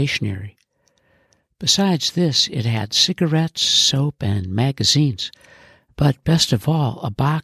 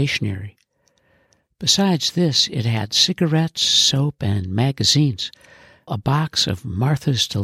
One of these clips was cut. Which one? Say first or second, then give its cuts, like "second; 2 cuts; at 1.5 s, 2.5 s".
second; 1 cut; at 5.9 s